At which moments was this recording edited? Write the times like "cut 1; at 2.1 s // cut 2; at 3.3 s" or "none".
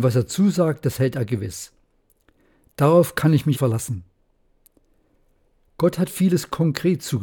cut 1; at 3.5 s